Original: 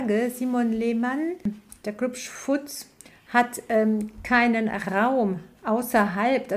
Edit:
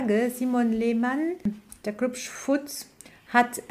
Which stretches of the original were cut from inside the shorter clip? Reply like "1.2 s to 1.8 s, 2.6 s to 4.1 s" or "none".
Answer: none